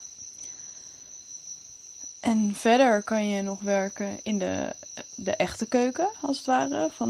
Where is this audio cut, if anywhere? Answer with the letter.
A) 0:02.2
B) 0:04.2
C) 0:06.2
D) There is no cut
B